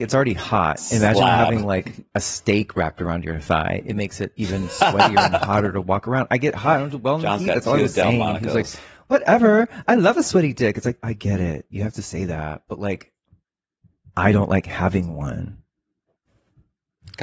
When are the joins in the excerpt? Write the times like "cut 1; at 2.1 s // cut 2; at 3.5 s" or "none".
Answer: none